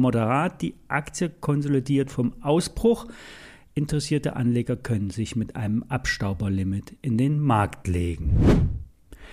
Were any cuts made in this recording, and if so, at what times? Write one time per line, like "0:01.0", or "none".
none